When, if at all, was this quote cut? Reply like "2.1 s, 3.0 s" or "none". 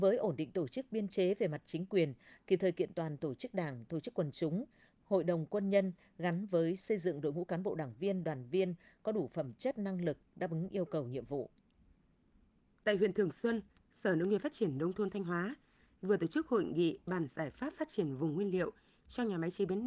none